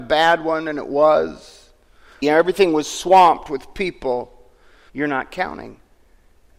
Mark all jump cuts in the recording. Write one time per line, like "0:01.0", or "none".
0:02.2
0:04.9